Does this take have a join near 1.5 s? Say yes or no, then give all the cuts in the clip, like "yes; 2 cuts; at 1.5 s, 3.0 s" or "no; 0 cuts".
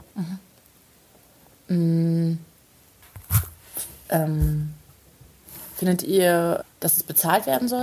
no; 1 cut; at 6.6 s